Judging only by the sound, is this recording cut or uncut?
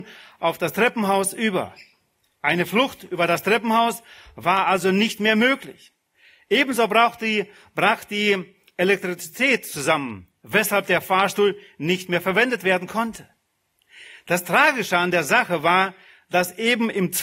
uncut